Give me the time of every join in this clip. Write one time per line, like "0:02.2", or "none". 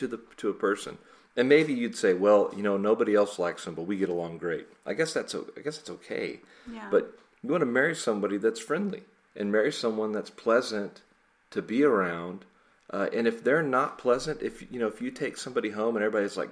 none